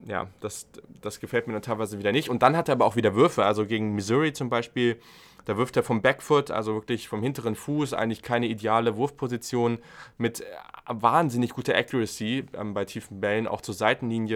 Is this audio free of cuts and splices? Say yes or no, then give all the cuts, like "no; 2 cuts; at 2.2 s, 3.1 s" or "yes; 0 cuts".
yes; 0 cuts